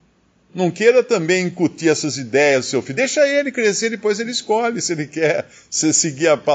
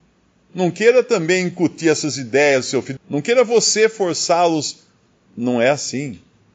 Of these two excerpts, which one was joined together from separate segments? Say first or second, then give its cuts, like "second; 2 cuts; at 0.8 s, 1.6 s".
second; 1 cut; at 3.0 s